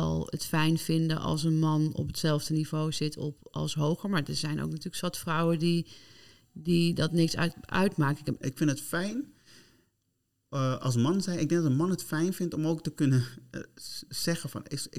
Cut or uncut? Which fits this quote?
cut